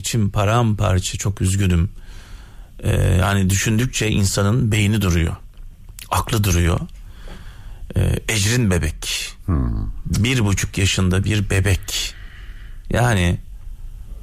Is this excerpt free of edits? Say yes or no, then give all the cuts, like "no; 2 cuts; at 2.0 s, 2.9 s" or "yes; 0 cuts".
yes; 0 cuts